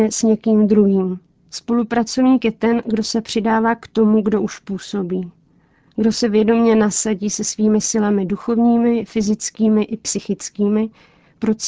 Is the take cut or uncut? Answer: uncut